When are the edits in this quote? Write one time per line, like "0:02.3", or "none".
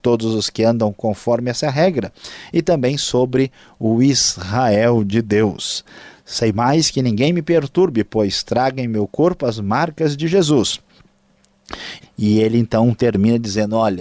0:12.0